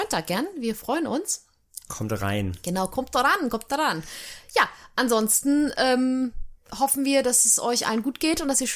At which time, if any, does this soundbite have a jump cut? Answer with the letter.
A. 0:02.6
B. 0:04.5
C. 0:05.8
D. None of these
D